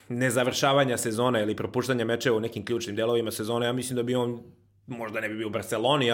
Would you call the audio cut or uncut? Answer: uncut